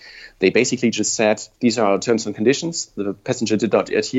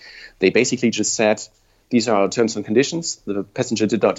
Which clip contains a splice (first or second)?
first